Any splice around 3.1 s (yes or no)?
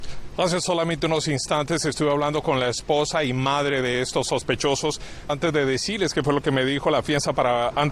no